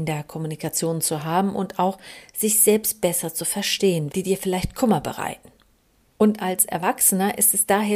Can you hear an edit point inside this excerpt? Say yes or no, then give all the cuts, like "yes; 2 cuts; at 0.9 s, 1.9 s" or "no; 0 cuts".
yes; 1 cut; at 4.1 s